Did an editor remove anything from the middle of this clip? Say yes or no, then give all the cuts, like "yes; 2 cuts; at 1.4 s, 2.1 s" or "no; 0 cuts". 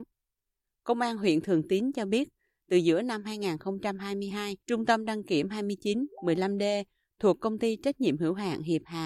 yes; 1 cut; at 4.6 s